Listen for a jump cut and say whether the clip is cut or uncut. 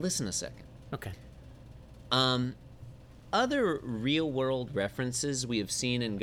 uncut